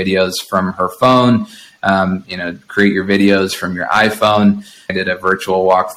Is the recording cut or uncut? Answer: cut